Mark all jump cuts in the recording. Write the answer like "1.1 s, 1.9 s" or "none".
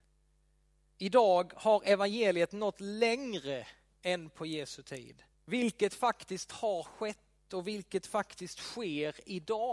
5.3 s

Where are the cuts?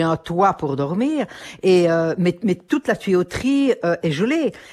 none

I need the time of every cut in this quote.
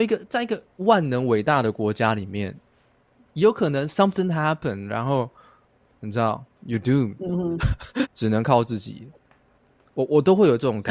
8.1 s

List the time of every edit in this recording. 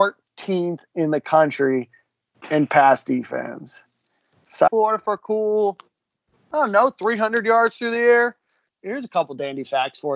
4.7 s, 8.7 s

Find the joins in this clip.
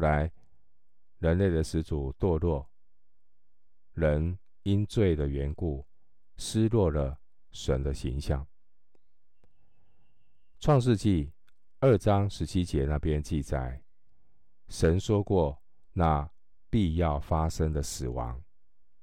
none

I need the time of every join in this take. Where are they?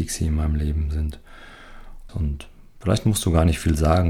2.1 s

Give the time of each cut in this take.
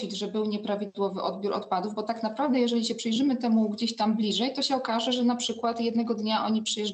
none

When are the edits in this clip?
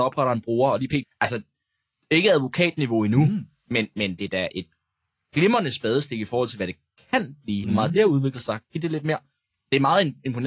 1.0 s, 7.6 s

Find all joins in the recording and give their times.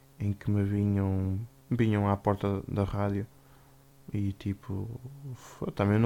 1.6 s

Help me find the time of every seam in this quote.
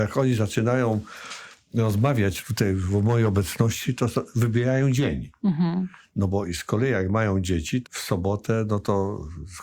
7.8 s

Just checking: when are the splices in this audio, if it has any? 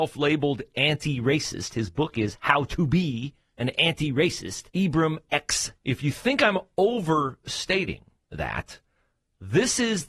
4.7 s, 5.8 s

